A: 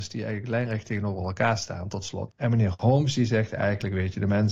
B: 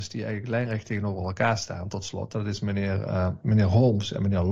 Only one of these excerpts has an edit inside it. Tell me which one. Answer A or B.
A